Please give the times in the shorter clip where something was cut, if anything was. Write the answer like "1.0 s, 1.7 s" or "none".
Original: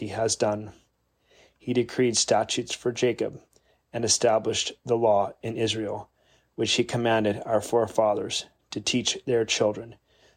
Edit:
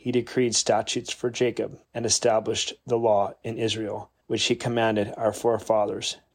1.8 s, 4.2 s